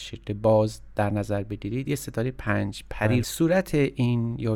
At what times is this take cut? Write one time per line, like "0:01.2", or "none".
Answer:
0:03.2